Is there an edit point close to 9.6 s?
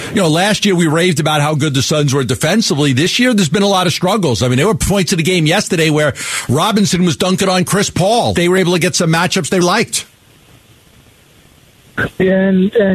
yes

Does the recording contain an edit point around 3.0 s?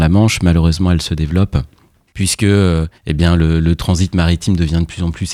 yes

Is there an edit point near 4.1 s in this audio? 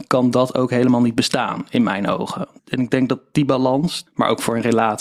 yes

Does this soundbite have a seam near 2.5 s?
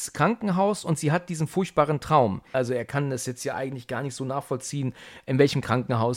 yes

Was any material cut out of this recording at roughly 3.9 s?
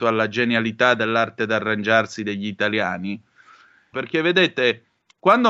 yes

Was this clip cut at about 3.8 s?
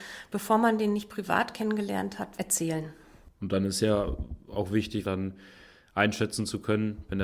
no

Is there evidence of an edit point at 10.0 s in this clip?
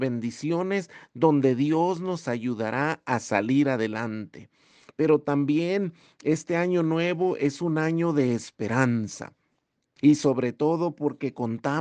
yes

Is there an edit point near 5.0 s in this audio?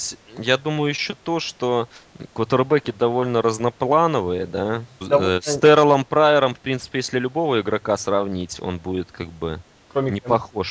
yes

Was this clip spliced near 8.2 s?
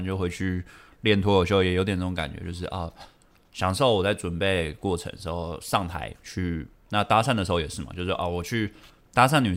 no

